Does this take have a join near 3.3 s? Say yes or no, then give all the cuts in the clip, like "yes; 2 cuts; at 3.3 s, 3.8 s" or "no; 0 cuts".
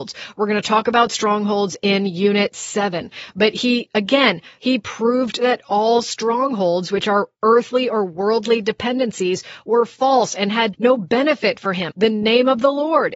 no; 3 cuts; at 4.6 s, 10.7 s, 11.9 s